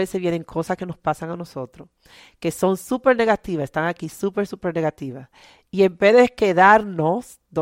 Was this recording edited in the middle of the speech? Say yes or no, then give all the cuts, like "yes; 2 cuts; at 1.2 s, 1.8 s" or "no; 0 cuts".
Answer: no; 0 cuts